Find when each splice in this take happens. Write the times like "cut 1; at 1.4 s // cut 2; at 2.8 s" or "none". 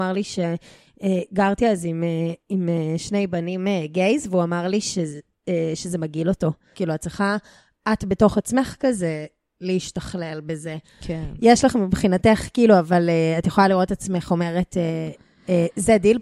cut 1; at 6.7 s